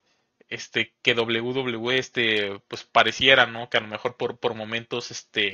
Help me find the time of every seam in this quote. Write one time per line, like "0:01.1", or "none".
none